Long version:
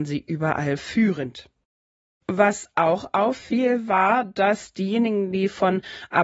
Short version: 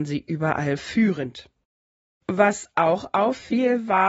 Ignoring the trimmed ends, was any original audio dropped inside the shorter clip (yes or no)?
no